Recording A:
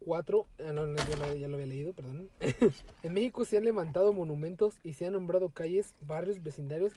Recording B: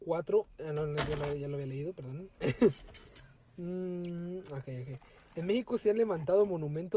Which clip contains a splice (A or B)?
A